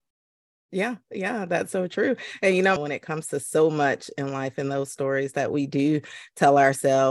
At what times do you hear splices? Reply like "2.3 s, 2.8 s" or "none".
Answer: 2.8 s